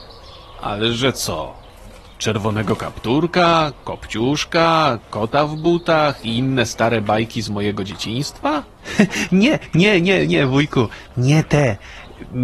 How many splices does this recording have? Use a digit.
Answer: 0